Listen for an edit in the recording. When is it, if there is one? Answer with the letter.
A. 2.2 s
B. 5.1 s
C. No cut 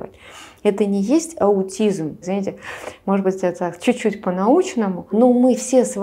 A